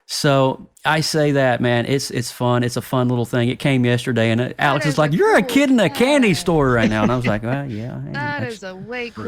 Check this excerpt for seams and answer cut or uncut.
uncut